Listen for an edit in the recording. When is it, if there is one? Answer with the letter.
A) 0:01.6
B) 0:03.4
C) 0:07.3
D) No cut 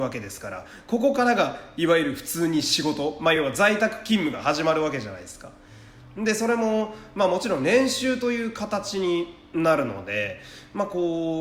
D